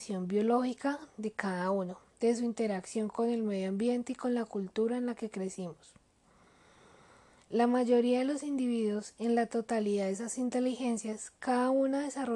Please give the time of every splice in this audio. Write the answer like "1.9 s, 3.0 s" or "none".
7.4 s